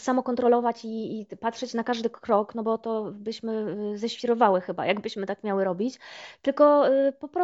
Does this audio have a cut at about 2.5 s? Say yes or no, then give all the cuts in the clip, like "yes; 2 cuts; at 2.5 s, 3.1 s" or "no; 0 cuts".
no; 0 cuts